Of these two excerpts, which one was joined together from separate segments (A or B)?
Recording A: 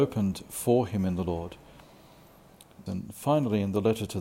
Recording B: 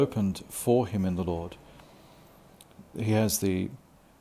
A